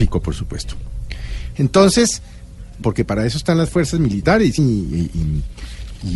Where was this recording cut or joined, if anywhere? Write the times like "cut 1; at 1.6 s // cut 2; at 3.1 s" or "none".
cut 1; at 1.5 s // cut 2; at 2.8 s // cut 3; at 4.6 s

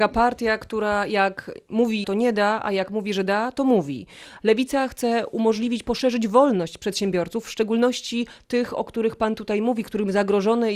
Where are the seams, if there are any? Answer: cut 1; at 2.0 s // cut 2; at 4.4 s

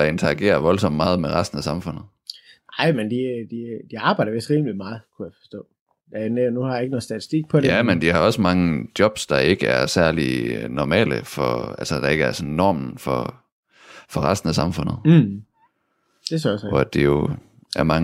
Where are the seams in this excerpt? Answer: none

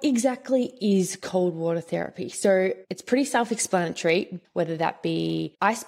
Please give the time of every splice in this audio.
cut 1; at 4.4 s

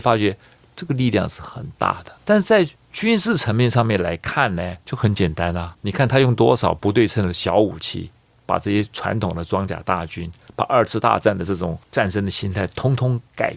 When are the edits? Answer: none

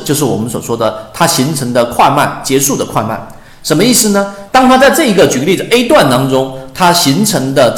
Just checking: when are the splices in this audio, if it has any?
cut 1; at 4.5 s

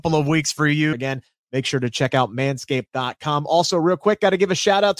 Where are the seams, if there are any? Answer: cut 1; at 0.9 s

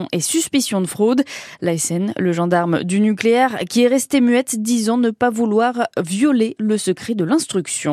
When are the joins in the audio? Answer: none

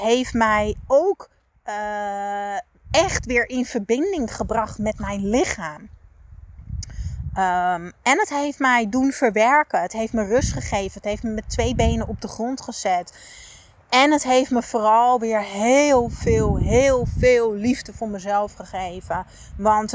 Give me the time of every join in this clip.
none

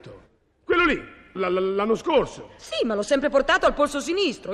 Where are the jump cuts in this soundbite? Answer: cut 1; at 1.4 s

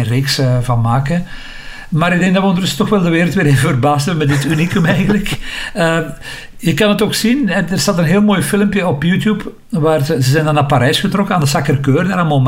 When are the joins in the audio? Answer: none

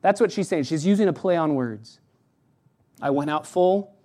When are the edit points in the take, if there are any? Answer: none

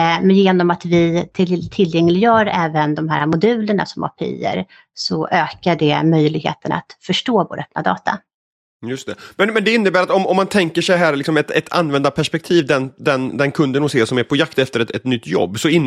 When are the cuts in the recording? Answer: none

